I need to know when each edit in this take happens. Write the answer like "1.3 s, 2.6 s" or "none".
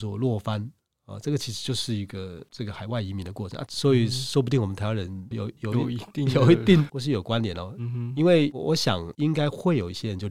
3.7 s, 5.3 s, 6.9 s

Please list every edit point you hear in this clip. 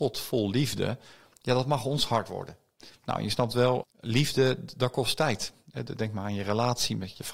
3.8 s

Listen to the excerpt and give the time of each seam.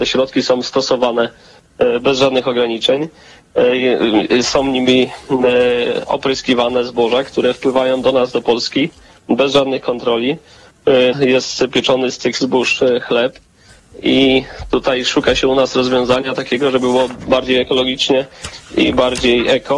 11.1 s

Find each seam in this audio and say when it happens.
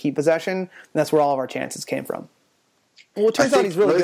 3.1 s

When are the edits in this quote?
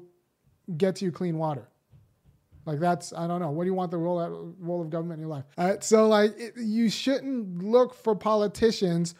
5.5 s

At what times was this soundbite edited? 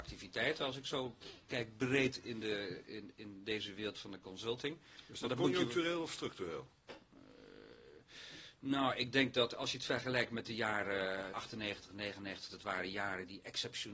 11.3 s, 12.5 s

